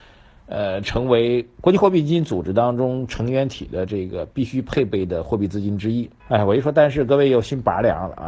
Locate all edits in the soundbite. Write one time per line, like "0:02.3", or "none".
0:06.2